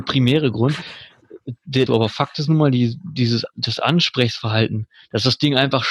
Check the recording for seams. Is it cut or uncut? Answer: cut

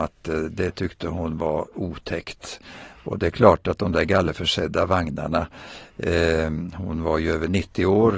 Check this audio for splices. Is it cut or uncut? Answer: uncut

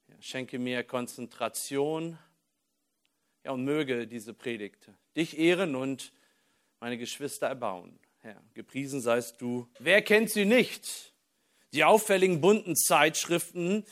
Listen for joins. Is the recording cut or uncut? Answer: cut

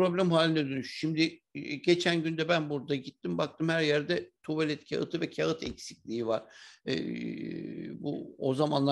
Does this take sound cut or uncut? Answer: uncut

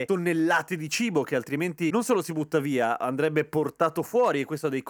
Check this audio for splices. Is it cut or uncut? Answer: uncut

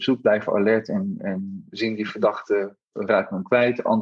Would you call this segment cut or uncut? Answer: cut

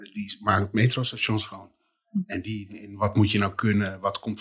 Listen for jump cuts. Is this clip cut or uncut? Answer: cut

